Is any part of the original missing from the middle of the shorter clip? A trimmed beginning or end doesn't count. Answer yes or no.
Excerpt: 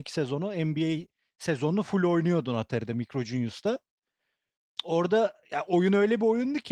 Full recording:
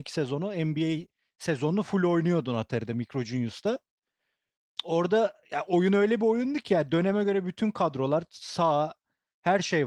no